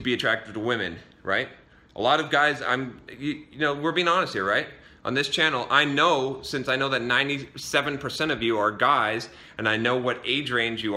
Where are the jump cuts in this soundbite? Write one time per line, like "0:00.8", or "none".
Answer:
none